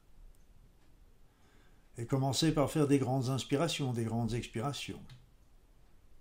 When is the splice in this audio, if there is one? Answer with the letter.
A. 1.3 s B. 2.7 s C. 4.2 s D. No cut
D